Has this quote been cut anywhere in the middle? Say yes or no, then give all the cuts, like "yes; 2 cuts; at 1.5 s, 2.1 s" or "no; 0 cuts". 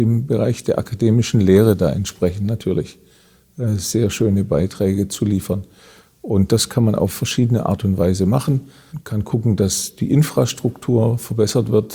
no; 0 cuts